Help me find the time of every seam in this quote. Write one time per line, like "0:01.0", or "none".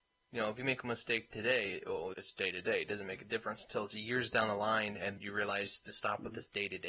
0:02.1
0:05.2